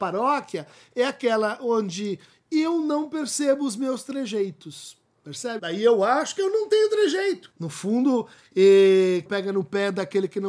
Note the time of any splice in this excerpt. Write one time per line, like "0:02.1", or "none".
0:05.6
0:07.5
0:09.3